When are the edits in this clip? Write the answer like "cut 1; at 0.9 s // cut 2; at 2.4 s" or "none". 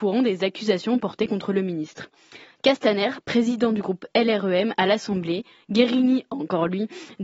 none